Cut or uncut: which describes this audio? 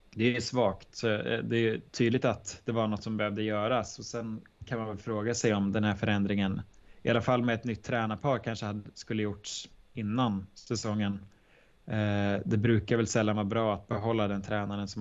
cut